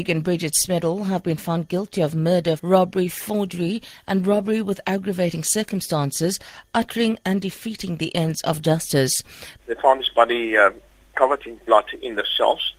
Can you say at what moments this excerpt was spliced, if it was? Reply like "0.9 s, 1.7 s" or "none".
2.6 s, 9.6 s, 11.1 s